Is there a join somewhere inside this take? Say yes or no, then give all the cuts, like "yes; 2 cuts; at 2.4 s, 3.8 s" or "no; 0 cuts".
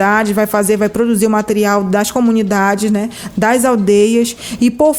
no; 0 cuts